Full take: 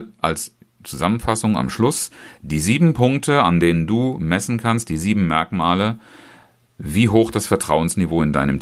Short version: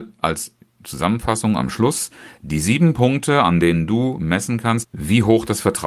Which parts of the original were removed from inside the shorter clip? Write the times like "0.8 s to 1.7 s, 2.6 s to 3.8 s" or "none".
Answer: 4.8 s to 6.7 s